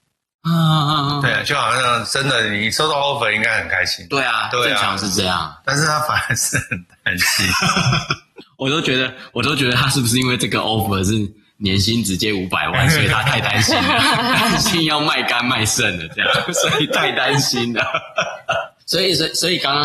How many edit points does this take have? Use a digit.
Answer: 0